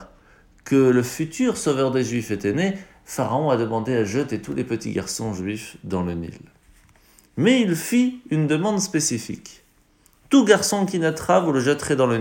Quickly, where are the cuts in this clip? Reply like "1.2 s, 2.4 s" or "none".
none